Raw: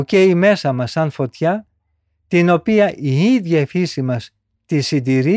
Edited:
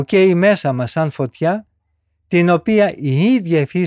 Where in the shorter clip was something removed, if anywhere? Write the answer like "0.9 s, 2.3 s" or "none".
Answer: none